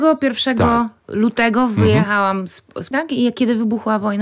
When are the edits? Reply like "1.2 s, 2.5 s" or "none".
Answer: 2.9 s